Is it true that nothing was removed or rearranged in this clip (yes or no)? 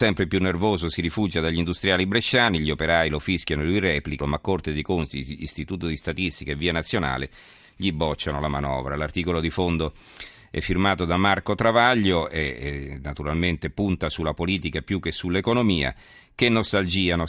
no